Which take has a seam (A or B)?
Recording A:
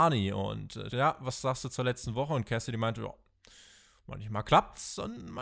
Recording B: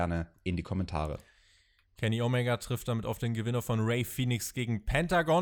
A